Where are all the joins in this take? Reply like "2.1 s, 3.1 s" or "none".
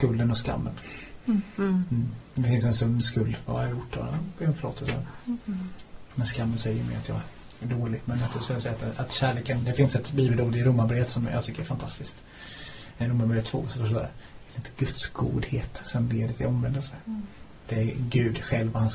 none

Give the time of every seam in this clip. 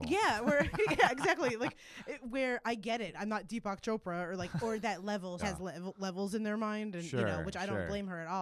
3.1 s, 5.4 s

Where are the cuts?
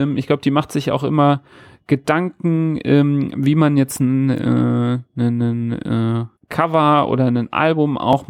6.4 s

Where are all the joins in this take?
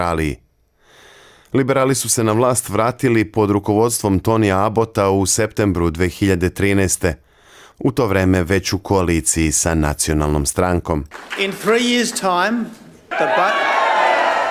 13.1 s

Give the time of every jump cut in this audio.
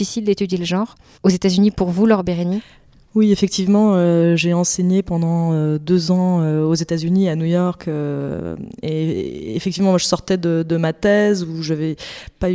1.2 s

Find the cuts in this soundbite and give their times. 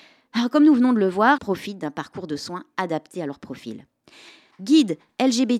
1.4 s, 4.5 s

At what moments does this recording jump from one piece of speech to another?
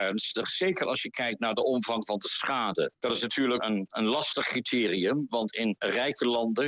3.6 s

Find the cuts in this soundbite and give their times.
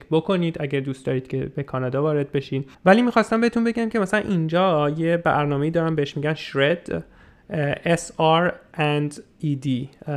2.7 s

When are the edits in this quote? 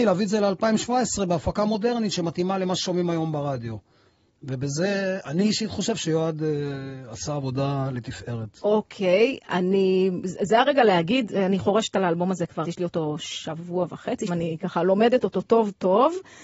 12.6 s, 14.3 s

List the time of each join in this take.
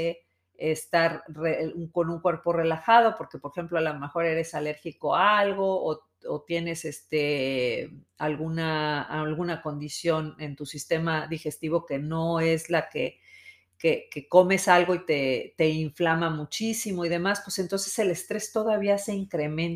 none

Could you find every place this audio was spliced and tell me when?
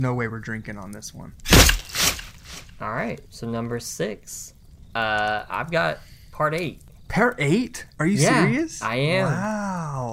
none

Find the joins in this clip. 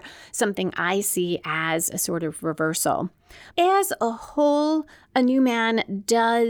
3.5 s

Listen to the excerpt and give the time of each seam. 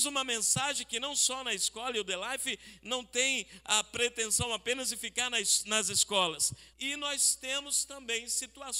6.7 s

